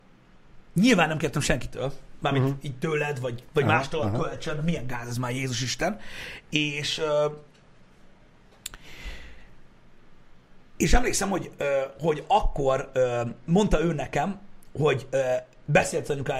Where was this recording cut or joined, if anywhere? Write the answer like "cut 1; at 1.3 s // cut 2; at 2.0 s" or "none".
cut 1; at 10.7 s